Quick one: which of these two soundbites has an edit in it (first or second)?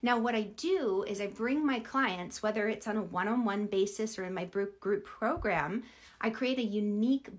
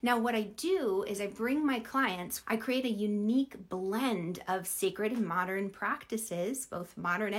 second